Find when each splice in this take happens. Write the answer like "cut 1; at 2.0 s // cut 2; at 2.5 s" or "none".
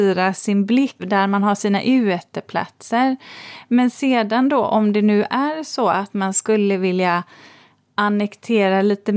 cut 1; at 1.0 s